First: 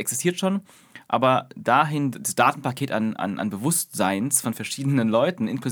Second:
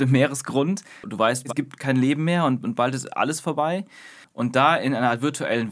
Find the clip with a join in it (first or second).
second